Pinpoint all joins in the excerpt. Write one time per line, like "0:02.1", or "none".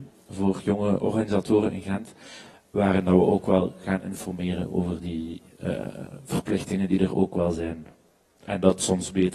none